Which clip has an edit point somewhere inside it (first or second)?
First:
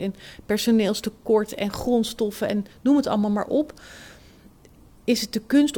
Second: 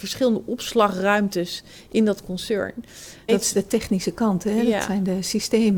second